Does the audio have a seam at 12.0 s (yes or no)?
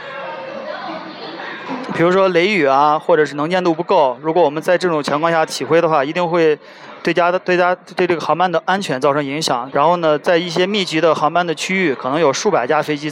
no